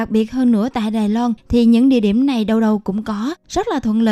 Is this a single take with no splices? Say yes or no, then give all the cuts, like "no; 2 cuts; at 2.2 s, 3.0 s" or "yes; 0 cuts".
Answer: yes; 0 cuts